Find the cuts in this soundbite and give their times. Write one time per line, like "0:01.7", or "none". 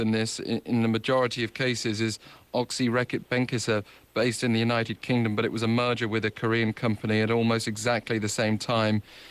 none